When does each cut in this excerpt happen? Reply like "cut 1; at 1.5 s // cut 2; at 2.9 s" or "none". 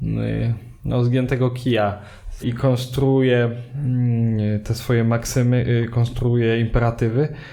cut 1; at 2.4 s